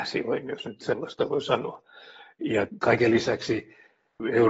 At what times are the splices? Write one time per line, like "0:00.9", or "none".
none